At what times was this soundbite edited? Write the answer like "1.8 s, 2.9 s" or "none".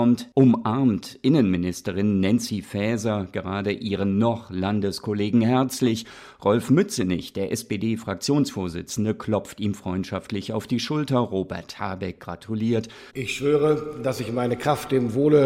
13.1 s